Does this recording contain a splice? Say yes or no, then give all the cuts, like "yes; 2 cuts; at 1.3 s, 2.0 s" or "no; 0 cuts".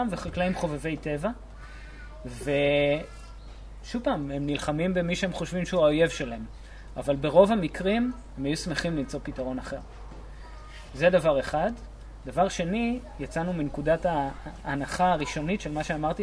no; 0 cuts